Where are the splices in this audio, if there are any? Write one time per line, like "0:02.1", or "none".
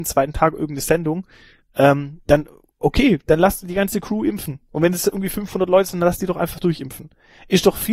none